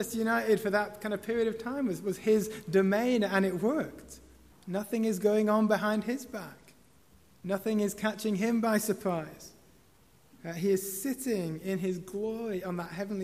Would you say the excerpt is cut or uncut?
cut